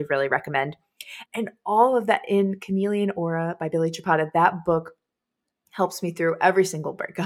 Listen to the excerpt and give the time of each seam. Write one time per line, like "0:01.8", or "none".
0:01.3